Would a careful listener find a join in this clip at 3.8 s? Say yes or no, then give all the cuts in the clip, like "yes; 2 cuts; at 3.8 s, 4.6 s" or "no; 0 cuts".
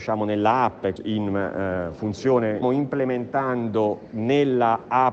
no; 2 cuts; at 1.0 s, 2.6 s